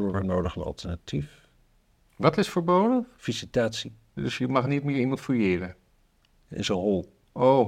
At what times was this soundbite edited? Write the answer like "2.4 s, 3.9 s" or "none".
none